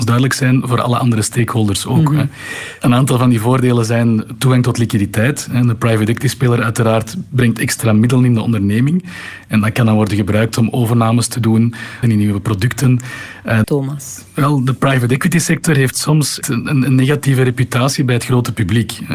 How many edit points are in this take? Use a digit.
3